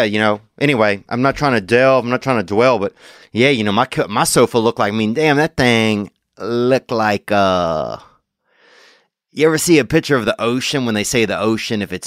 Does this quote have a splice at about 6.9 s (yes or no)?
no